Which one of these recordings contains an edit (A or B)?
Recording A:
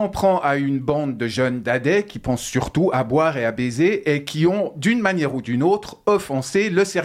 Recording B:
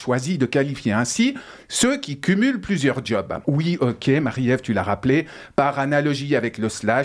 B